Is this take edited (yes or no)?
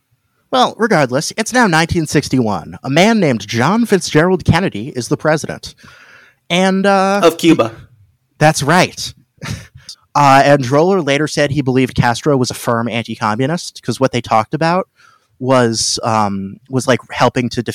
yes